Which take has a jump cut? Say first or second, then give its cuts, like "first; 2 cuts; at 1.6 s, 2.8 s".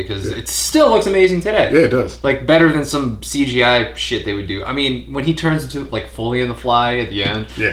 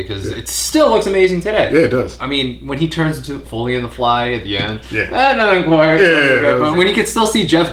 second; 3 cuts; at 2.2 s, 3.4 s, 6.7 s